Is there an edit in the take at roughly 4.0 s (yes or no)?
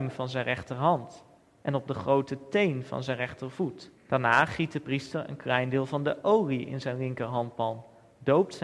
yes